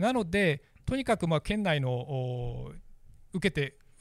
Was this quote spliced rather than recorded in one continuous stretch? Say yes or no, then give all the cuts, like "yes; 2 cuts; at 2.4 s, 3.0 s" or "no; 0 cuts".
no; 0 cuts